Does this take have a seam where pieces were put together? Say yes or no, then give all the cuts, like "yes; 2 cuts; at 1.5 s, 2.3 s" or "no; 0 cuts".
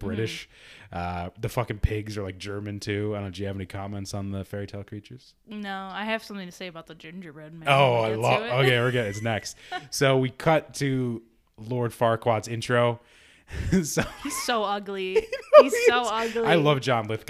no; 0 cuts